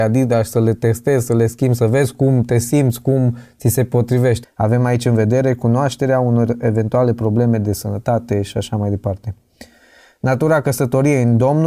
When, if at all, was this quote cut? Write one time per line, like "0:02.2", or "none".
0:04.4

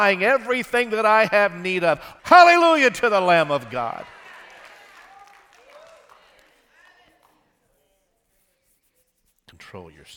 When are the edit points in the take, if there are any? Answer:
0:02.2

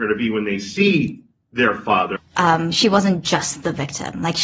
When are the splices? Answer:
0:02.2

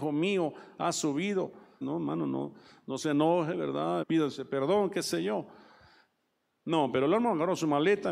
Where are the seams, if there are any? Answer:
0:01.8
0:04.0

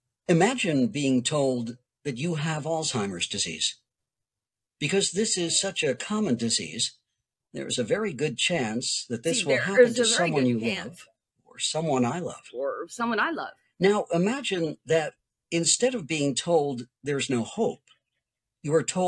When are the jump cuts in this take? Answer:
none

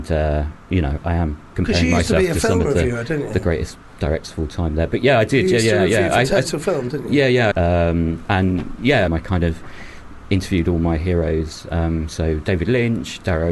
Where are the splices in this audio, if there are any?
0:07.5
0:09.1

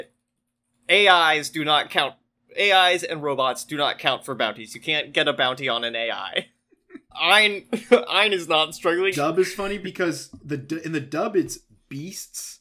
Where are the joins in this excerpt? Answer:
0:07.1
0:09.1

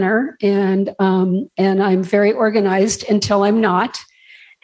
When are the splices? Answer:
none

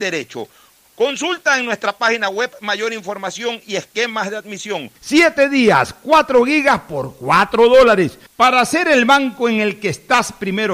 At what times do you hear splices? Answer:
0:05.0
0:08.3

